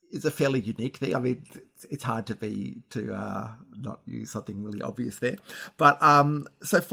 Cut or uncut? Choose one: uncut